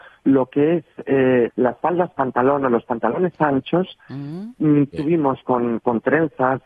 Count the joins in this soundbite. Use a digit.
2